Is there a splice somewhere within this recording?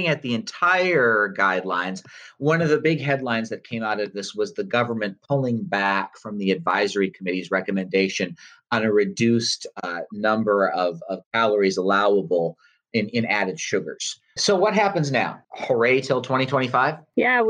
yes; 2 cuts; at 14.4 s, 15.4 s

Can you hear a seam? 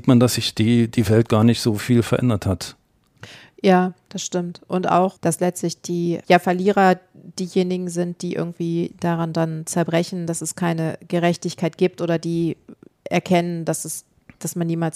no; 0 cuts

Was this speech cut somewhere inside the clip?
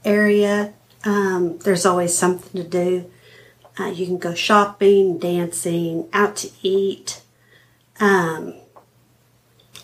no; 0 cuts

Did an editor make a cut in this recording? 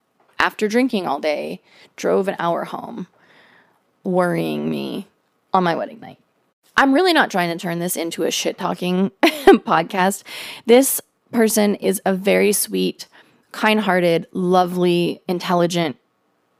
no; 0 cuts

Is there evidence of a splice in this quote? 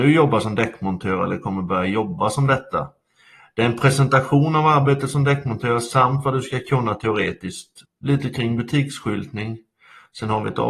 yes; 1 cut; at 7.8 s

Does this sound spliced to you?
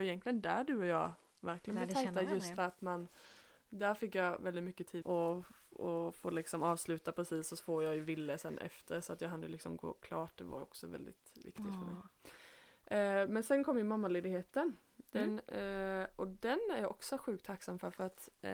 yes; 1 cut; at 5.0 s

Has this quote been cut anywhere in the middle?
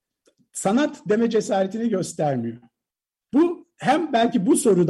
yes; 1 cut; at 3.3 s

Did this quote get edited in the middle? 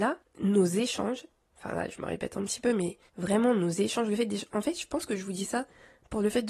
yes; 1 cut; at 3.1 s

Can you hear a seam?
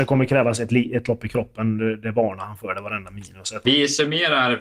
yes; 1 cut; at 3.6 s

